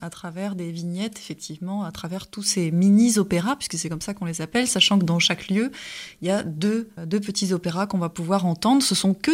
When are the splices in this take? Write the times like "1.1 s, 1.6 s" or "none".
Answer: 7.0 s